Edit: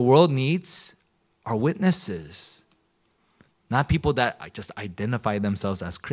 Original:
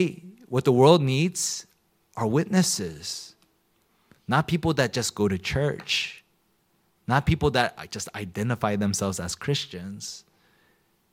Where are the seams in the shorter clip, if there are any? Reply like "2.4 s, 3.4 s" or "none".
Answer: 3.5 s